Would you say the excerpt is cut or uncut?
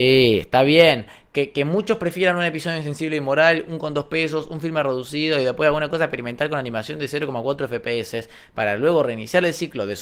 uncut